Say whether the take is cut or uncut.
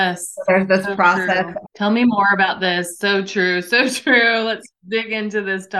cut